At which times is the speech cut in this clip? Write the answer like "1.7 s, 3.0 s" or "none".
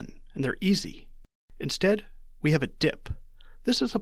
1.5 s